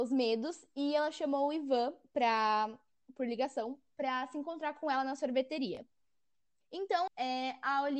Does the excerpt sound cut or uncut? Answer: cut